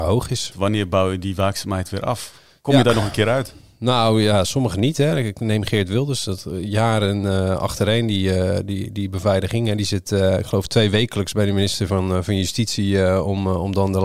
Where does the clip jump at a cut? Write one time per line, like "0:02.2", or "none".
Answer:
none